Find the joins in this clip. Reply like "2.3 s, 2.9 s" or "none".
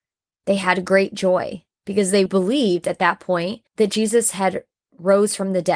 2.3 s, 3.7 s